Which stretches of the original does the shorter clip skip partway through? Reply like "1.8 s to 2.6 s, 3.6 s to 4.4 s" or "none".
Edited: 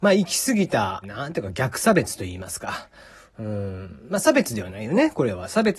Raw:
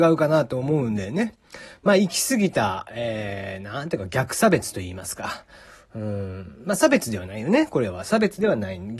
2.8 s to 3.6 s